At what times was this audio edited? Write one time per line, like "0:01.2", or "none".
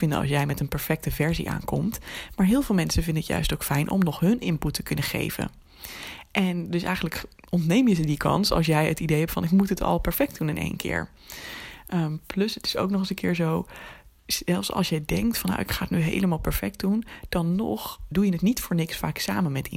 0:18.1